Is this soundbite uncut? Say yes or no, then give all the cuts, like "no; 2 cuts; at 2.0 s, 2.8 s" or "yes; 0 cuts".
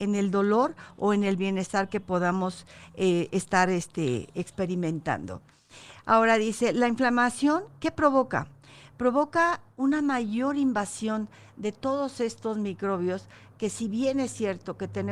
yes; 0 cuts